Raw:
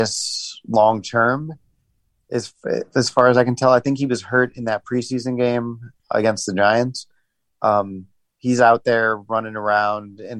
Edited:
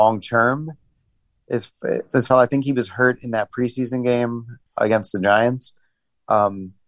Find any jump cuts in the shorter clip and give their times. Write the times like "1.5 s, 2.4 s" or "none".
2.3 s